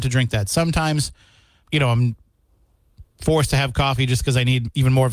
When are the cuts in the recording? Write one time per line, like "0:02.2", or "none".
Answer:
0:01.6
0:03.1

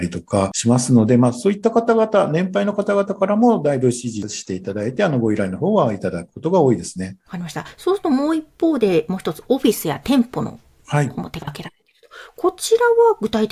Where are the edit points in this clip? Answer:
0:07.2

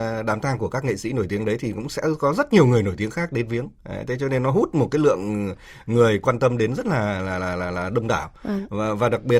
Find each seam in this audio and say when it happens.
none

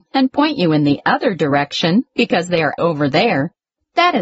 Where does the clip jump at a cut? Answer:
0:02.8

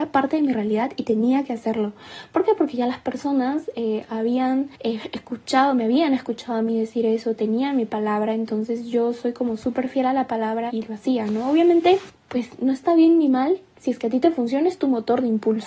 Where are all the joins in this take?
0:10.7
0:12.1

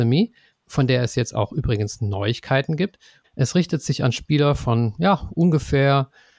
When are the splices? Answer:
0:03.2

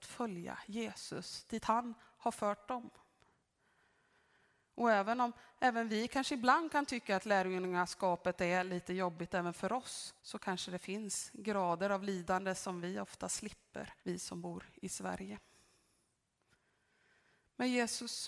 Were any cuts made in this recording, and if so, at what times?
0:10.2
0:14.0

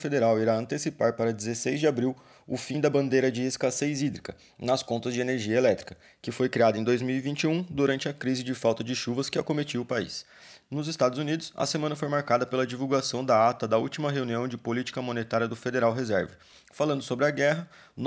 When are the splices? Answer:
0:16.5

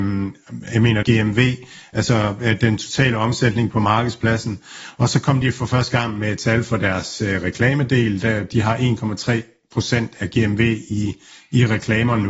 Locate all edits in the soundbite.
0:01.0

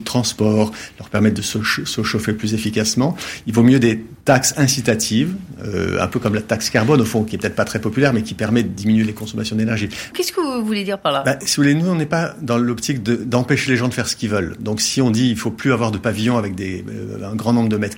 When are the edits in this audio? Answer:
0:04.2
0:10.1

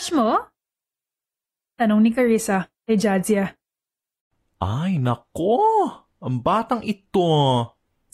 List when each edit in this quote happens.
none

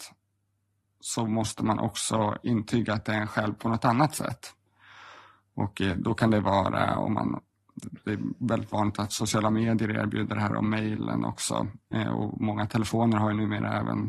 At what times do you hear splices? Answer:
none

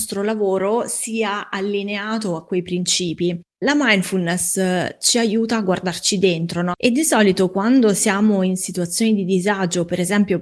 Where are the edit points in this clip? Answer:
0:06.7

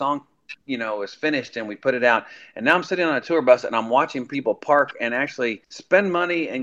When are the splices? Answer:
0:05.6

